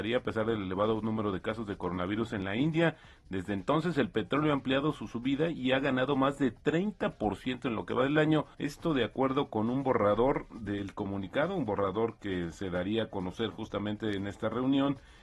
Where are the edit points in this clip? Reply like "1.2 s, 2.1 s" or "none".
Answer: 8.5 s